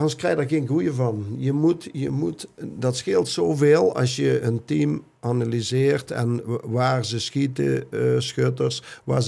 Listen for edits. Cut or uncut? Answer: uncut